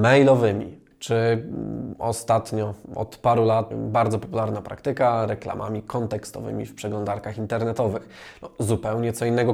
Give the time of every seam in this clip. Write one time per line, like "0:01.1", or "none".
0:00.9
0:03.7
0:08.3